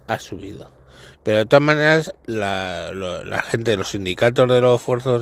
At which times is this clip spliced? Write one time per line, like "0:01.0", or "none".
0:01.1